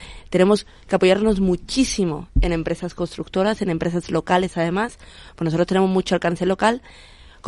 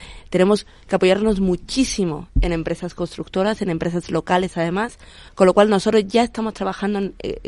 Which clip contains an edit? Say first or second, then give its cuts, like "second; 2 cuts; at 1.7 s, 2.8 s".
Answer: second; 1 cut; at 5.3 s